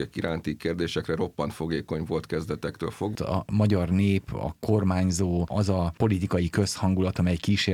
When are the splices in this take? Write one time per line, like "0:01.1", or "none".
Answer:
0:03.1